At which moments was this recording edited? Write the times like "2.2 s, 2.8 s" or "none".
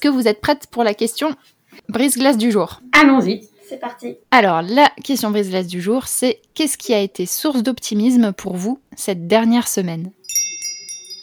4.2 s